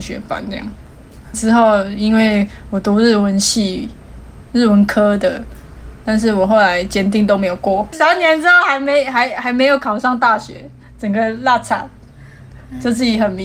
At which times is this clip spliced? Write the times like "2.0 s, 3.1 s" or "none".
1.3 s, 7.9 s